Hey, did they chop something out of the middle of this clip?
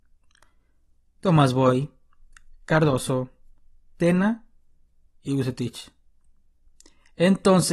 no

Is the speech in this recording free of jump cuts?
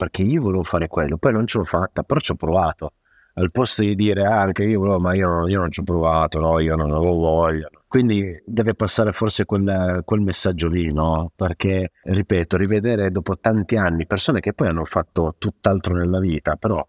yes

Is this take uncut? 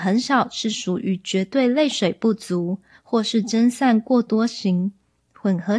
yes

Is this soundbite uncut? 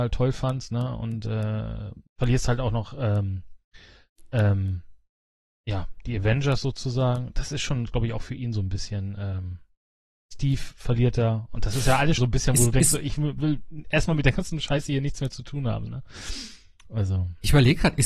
no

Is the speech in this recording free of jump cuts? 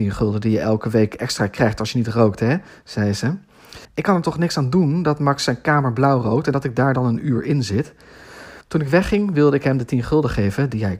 no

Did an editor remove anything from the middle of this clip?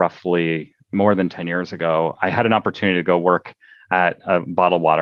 no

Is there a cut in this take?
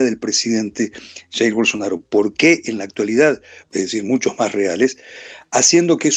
yes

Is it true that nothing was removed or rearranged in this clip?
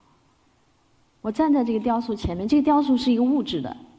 yes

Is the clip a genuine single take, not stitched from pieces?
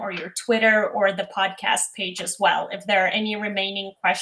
yes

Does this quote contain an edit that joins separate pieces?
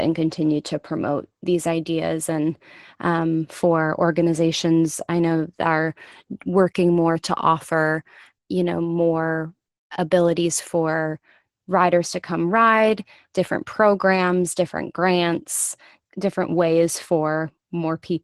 no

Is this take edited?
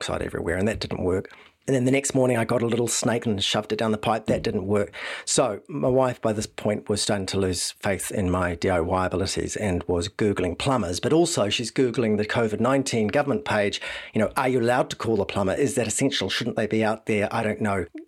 no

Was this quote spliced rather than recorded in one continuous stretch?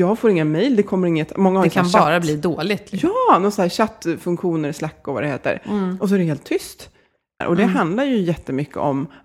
yes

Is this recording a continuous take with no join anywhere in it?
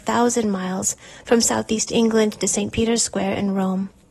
yes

